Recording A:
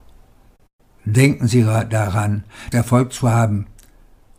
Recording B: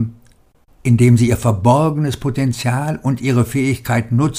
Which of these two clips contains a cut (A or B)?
A